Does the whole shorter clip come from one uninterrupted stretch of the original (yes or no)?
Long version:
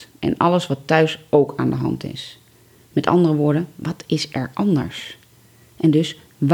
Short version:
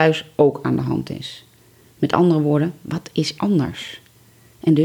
no